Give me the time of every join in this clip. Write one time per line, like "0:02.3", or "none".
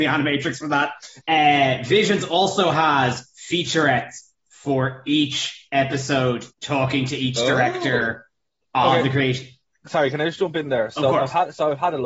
0:01.2
0:06.5